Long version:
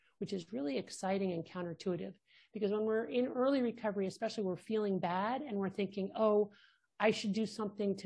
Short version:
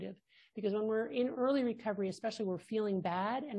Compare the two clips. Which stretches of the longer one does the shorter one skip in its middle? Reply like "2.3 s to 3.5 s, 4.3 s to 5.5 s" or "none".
none

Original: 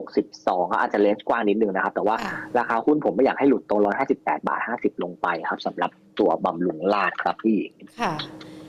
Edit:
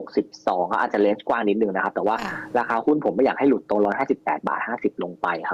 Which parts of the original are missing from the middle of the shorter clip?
none

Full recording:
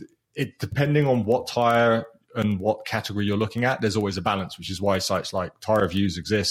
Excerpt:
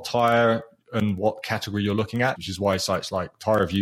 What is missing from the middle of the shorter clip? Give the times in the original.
3.8 s to 4.6 s

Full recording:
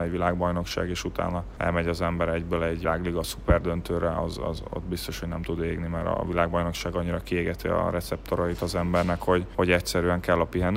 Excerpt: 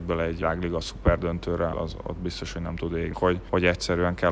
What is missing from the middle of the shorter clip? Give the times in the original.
4.2 s to 4.4 s, 5.8 s to 9.2 s

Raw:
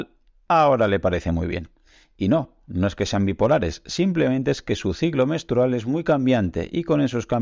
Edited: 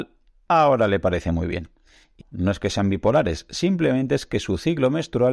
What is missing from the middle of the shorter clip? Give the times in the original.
2.2 s to 2.6 s

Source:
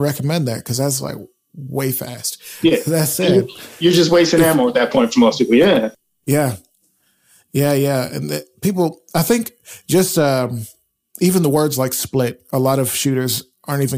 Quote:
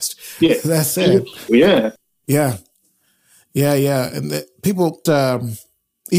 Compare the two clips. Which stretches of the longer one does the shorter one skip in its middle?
3.7 s to 5.5 s, 9.0 s to 10.1 s

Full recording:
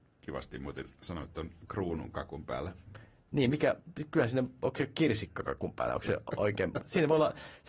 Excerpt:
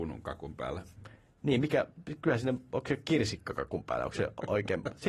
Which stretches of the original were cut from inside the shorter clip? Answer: none

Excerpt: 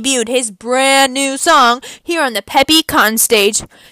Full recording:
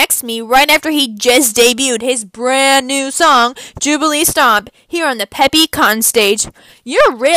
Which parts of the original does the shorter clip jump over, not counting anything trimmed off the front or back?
3.7 s to 4.8 s

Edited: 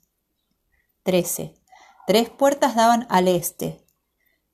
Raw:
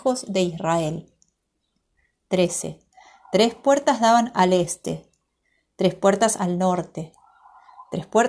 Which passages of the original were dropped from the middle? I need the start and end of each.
none

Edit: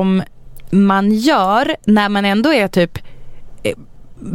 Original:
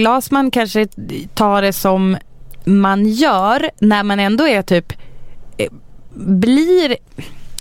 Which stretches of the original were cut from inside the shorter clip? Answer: none

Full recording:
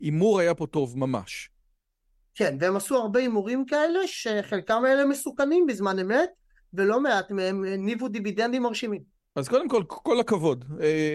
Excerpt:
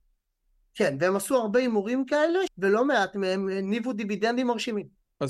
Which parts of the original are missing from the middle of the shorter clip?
4.1 s to 6.6 s

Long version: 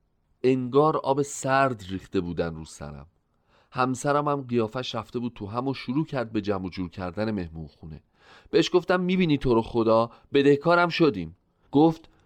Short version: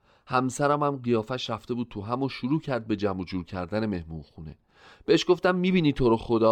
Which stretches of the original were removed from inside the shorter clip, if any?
none

